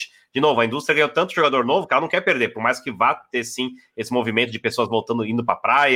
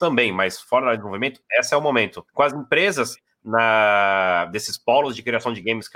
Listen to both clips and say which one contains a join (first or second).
second